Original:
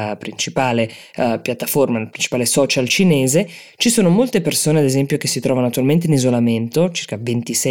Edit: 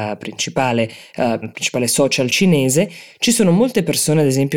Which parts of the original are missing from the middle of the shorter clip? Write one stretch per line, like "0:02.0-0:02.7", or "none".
0:01.4-0:02.0